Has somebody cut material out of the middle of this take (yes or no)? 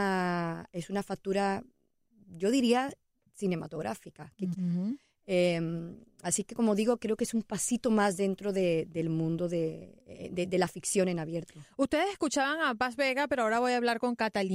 yes